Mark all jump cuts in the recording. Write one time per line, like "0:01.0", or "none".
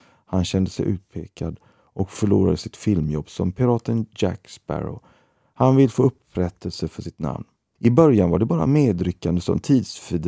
0:07.8